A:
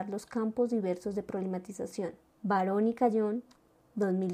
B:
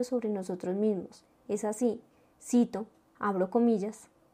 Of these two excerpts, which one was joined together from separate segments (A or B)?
A